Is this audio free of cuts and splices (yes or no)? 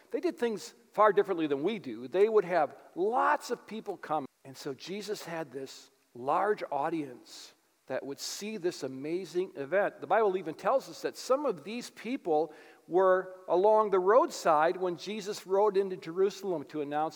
no